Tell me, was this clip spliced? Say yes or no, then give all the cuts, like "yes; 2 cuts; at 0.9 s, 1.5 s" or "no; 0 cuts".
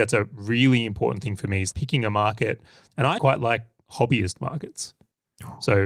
yes; 2 cuts; at 1.7 s, 3.2 s